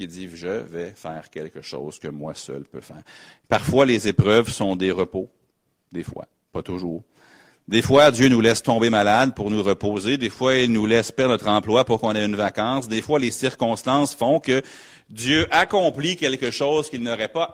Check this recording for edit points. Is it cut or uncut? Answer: uncut